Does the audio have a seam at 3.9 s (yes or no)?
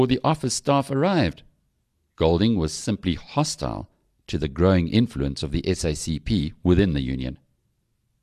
no